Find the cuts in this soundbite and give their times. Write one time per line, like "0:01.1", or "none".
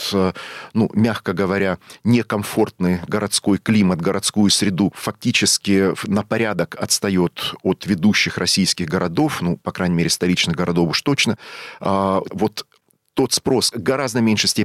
0:04.9
0:12.3
0:13.7